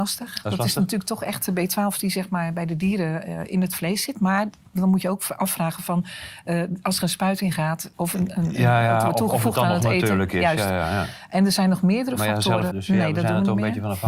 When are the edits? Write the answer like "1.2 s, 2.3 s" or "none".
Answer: 7.9 s, 12.7 s